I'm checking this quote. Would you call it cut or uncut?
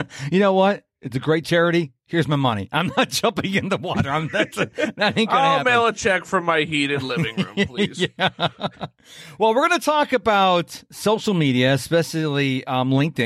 uncut